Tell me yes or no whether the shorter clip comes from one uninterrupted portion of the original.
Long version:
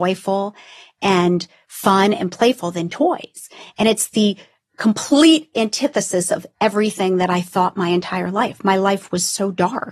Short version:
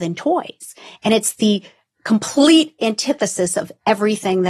yes